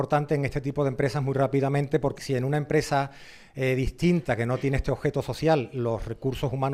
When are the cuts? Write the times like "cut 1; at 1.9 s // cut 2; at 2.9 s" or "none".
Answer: cut 1; at 2.2 s